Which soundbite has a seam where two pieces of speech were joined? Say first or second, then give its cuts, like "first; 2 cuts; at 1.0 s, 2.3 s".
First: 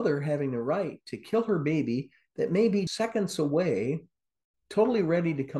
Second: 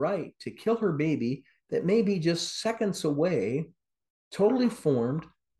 first; 2 cuts; at 2.9 s, 4.5 s